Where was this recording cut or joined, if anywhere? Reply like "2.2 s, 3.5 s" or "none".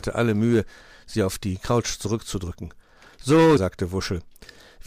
3.6 s